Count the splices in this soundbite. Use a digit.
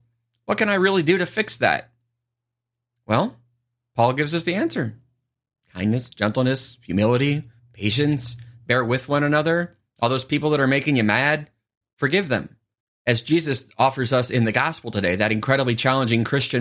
1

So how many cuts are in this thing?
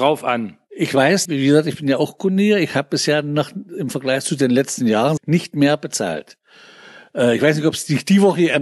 2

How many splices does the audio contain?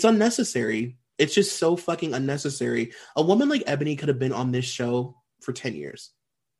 0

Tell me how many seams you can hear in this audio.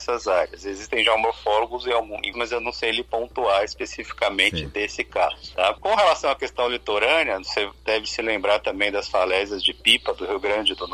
1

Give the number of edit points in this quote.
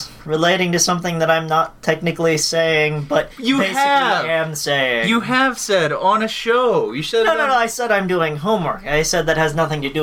0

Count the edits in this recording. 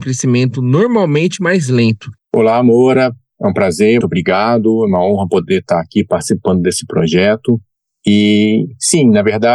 2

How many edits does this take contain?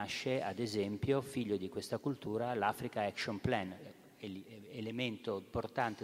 0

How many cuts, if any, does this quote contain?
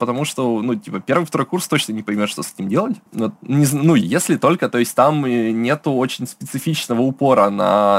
1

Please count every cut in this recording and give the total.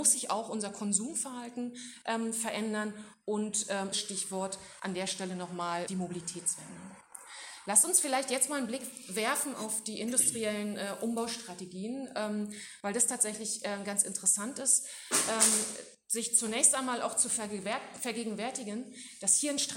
2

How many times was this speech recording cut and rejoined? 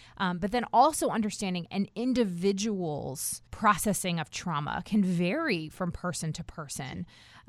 1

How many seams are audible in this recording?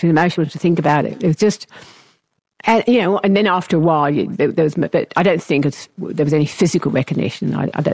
0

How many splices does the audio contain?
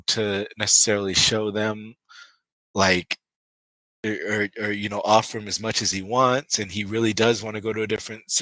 0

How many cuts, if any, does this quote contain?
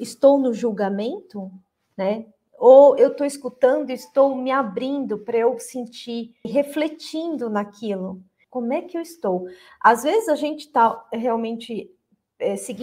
2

